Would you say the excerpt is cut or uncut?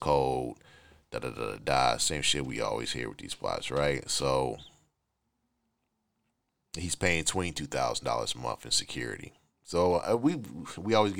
uncut